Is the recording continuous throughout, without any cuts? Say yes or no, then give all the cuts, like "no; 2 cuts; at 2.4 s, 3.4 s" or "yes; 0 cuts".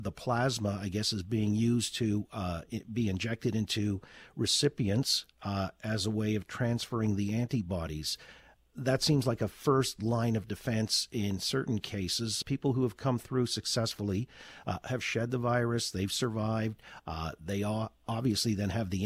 no; 1 cut; at 12.4 s